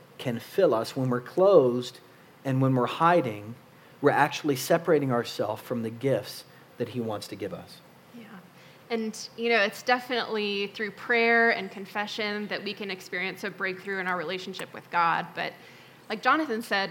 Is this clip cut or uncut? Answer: uncut